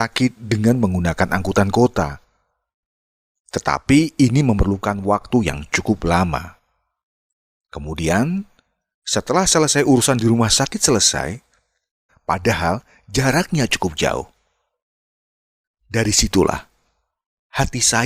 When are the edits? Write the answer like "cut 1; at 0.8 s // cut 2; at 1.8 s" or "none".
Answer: cut 1; at 12.1 s

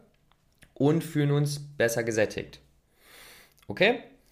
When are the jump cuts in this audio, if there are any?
none

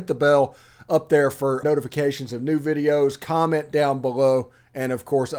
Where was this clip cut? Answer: cut 1; at 1.6 s

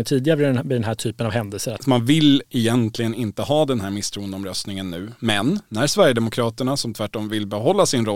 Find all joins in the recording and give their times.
cut 1; at 1.8 s // cut 2; at 6.8 s

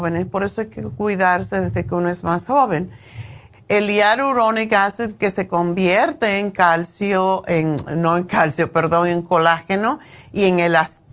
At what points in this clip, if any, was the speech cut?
cut 1; at 3.5 s

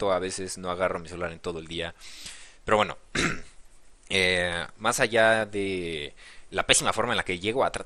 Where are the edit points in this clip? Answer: cut 1; at 6.5 s

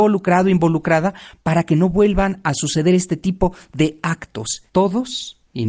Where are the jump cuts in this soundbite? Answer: none

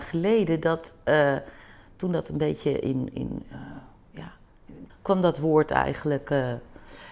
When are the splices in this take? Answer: cut 1; at 4.9 s

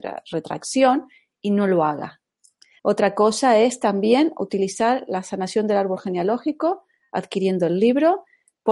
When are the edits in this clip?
cut 1; at 2.8 s

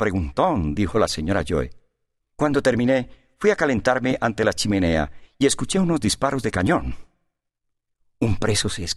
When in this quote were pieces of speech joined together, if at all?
cut 1; at 2.2 s

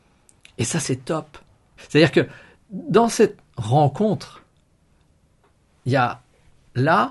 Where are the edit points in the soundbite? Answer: cut 1; at 1.8 s

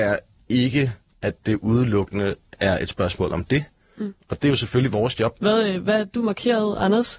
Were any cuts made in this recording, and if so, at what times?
cut 1; at 4.2 s // cut 2; at 5.4 s

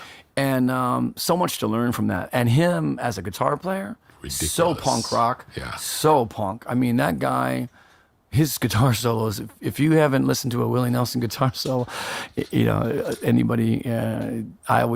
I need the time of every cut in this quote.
none

